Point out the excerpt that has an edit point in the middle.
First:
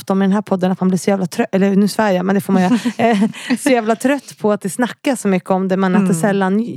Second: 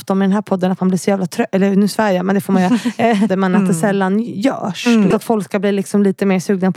second; 2 cuts; at 3.3 s, 5.1 s

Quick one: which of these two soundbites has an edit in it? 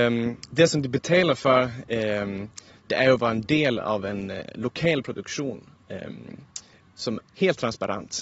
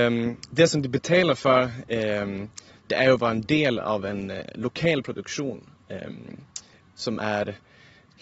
first; 1 cut; at 7.2 s

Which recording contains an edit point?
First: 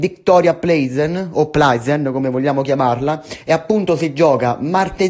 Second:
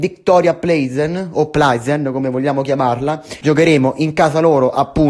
second; 1 cut; at 3.4 s

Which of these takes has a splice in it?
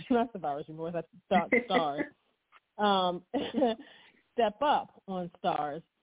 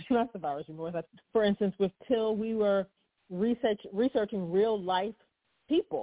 second; 1 cut; at 1.2 s

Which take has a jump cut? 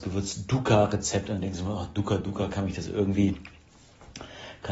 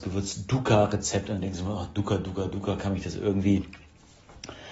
first; 1 cut; at 2.2 s

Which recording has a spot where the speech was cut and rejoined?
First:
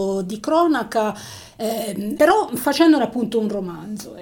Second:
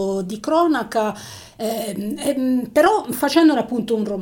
first; 1 cut; at 2.2 s

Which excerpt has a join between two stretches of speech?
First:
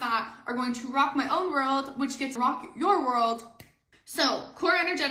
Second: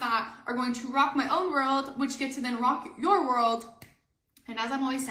first; 2 cuts; at 2.4 s, 3.9 s

